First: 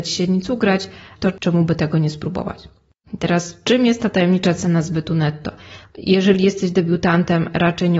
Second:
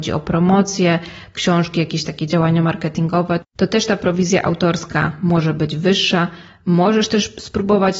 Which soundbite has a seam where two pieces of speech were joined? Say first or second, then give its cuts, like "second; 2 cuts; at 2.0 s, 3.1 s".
first; 3 cuts; at 1.1 s, 3.1 s, 5.8 s